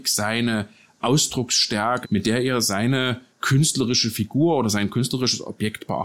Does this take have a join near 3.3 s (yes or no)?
yes